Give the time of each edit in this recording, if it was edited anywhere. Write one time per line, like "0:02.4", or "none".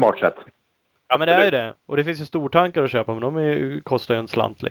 none